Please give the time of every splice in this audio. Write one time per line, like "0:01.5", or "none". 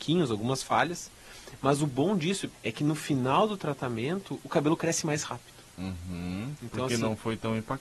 0:02.5